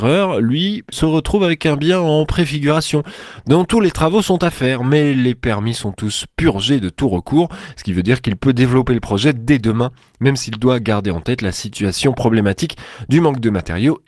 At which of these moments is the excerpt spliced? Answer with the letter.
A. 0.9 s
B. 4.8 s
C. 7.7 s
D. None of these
A